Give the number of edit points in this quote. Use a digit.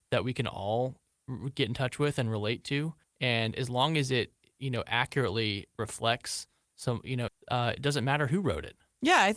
2